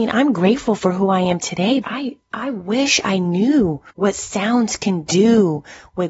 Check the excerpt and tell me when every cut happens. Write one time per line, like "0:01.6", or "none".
0:01.8
0:03.9